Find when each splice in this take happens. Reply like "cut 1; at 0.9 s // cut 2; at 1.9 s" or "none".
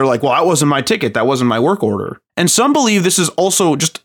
cut 1; at 2.3 s